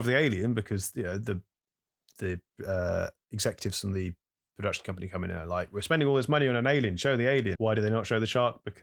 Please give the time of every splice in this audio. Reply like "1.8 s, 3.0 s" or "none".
7.6 s